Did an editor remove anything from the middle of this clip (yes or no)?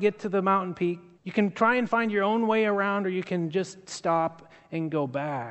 yes